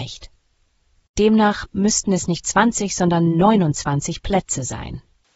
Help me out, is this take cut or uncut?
uncut